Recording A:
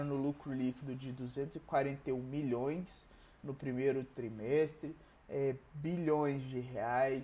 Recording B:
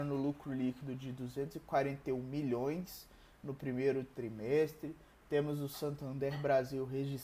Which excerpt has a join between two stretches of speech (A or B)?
A